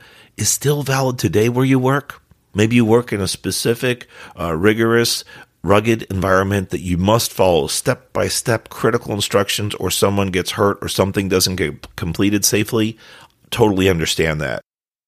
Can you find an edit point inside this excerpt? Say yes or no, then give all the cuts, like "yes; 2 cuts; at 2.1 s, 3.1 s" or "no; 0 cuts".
yes; 1 cut; at 2.5 s